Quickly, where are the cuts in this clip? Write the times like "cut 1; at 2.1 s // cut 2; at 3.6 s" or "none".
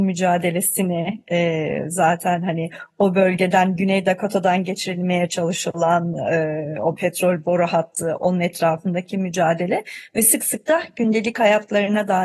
none